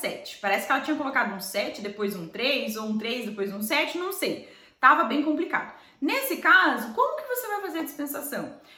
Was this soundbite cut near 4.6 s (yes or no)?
no